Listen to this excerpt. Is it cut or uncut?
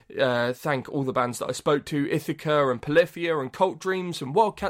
uncut